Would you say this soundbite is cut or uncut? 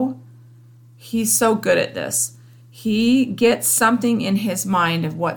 uncut